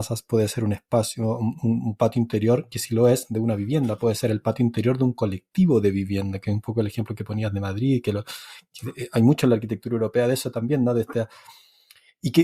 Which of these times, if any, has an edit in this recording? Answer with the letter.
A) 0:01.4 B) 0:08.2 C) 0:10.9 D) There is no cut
D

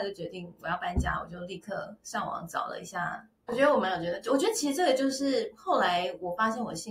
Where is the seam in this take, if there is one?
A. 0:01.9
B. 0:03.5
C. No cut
B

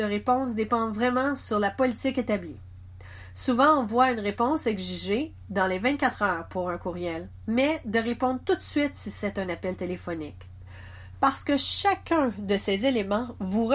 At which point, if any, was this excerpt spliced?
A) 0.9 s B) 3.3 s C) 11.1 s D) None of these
C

